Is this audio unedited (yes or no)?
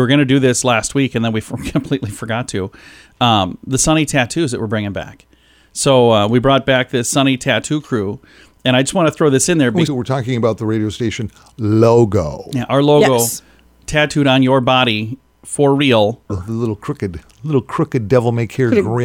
no